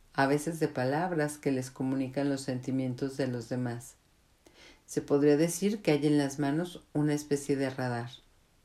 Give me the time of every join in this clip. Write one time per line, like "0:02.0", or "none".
none